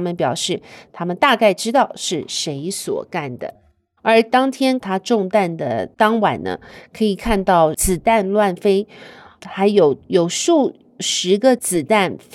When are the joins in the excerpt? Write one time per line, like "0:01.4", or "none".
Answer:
0:04.0